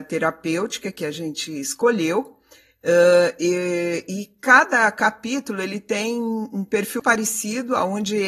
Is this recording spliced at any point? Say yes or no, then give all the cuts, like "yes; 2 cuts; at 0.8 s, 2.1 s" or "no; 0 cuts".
yes; 1 cut; at 7.0 s